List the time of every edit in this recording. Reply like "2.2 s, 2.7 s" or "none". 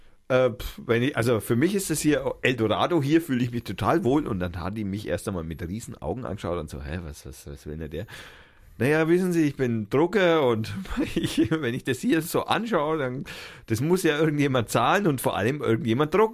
none

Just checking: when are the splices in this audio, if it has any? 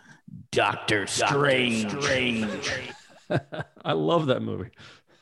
none

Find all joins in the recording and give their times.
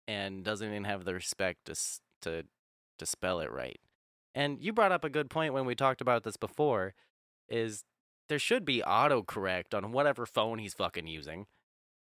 none

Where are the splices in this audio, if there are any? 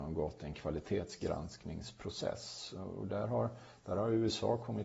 none

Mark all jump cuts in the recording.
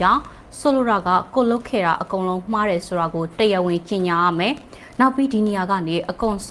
none

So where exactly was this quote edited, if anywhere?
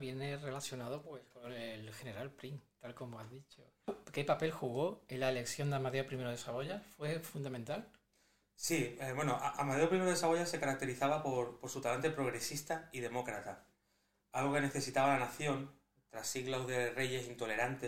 none

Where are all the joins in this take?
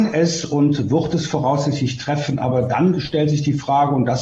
none

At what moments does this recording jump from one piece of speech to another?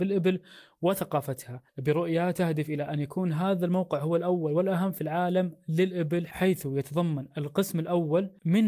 1.7 s

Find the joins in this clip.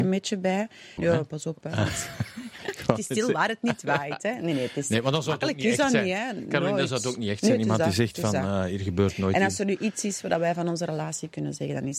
1.0 s

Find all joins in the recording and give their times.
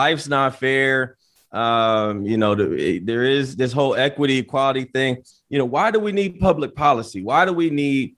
none

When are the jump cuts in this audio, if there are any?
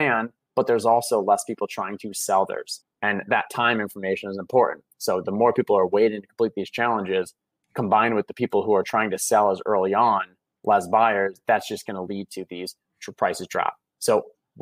2.8 s

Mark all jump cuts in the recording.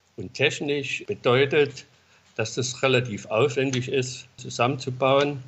4.4 s

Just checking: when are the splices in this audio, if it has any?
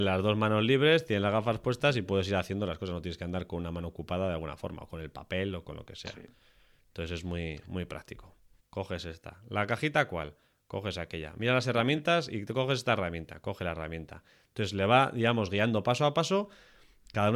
8.6 s

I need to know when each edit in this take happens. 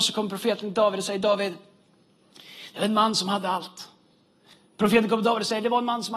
4.5 s

